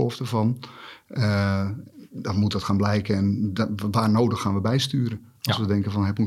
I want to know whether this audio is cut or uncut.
uncut